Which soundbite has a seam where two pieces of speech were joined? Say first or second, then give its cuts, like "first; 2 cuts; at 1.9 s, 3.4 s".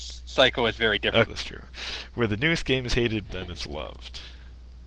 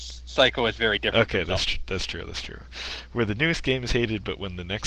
first; 2 cuts; at 1.3 s, 3.3 s